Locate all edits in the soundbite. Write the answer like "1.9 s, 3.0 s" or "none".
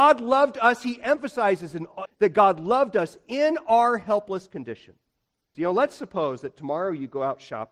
2.1 s, 5.5 s